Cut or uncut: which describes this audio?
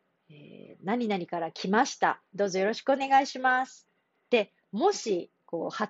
uncut